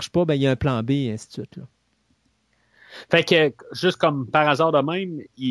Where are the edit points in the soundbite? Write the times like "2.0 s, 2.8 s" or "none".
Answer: none